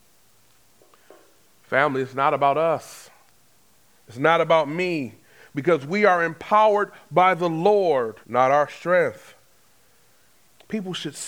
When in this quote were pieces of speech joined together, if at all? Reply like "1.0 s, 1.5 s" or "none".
8.2 s